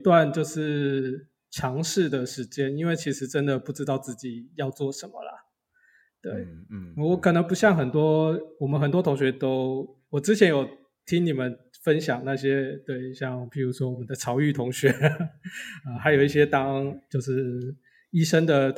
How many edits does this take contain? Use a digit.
0